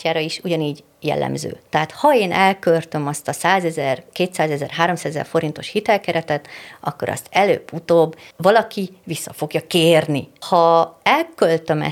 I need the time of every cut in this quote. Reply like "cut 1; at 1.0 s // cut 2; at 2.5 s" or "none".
cut 1; at 8.3 s // cut 2; at 10.4 s

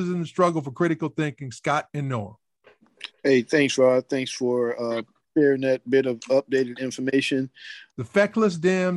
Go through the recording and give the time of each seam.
cut 1; at 7.9 s

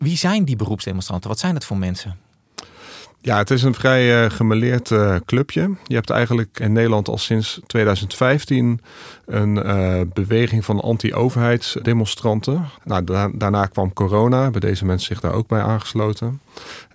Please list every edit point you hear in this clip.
cut 1; at 12.8 s

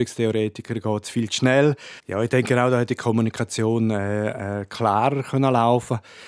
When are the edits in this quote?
cut 1; at 2.0 s

